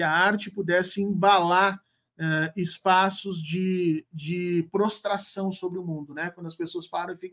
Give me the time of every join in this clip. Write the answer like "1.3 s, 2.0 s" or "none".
none